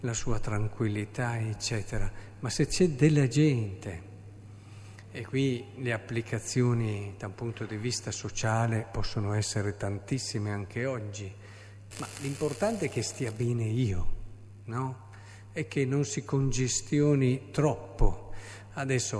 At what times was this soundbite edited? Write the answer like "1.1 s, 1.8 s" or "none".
11.9 s